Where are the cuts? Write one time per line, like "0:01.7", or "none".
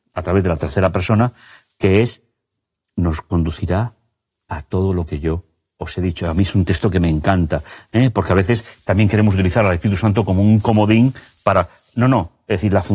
none